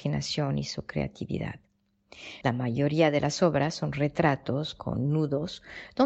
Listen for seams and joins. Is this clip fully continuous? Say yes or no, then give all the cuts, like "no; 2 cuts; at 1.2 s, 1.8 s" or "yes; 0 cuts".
no; 1 cut; at 2.4 s